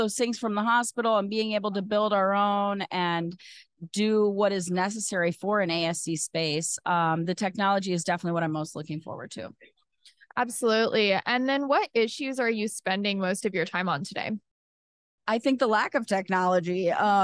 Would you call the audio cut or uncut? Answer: uncut